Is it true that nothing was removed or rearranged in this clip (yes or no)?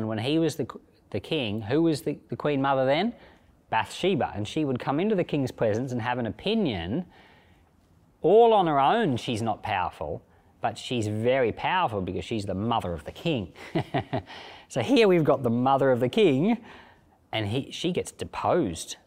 yes